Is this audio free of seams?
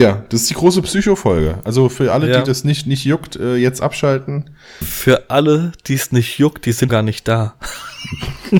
no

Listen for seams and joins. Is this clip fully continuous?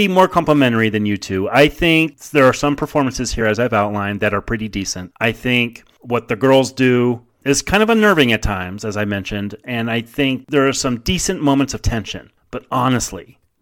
yes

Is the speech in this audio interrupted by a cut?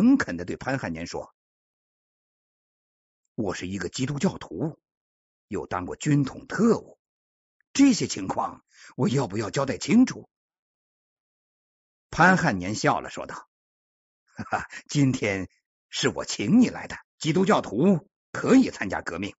yes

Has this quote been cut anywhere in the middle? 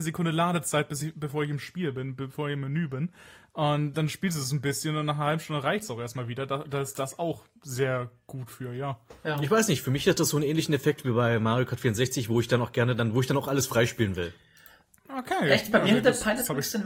no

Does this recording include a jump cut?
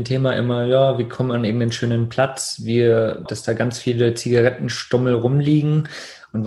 yes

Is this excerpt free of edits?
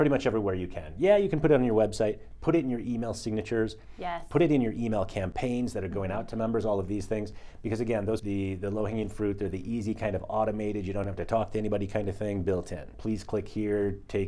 no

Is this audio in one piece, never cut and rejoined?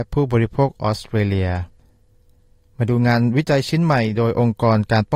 yes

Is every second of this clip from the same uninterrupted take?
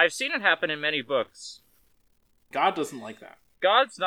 no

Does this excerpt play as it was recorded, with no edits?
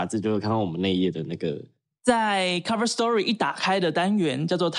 yes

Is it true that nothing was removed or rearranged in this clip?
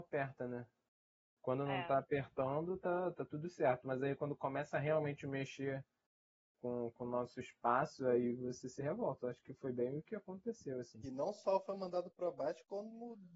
no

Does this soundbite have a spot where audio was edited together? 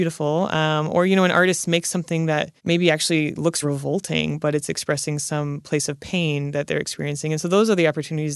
yes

